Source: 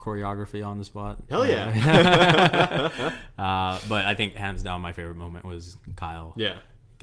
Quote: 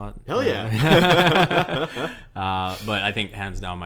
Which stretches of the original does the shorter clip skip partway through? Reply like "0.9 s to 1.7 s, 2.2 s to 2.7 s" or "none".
none